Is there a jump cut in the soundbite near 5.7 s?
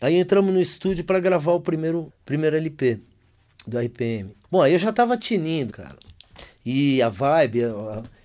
yes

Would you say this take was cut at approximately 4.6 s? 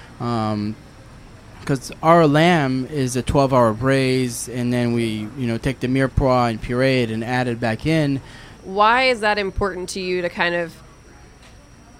no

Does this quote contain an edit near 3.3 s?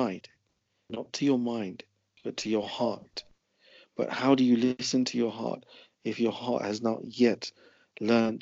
no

